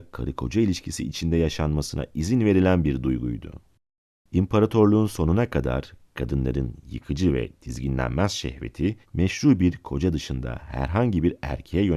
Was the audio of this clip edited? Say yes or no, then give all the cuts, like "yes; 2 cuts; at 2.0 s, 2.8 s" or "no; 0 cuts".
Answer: yes; 1 cut; at 9.0 s